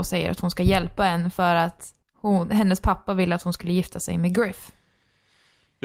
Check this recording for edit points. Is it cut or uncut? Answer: cut